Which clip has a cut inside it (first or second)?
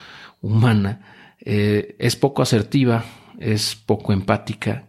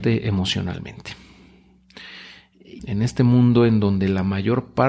second